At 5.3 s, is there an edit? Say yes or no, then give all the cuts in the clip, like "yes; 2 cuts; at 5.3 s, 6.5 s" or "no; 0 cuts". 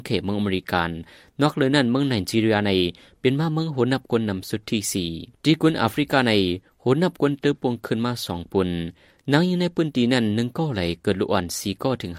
yes; 1 cut; at 5.3 s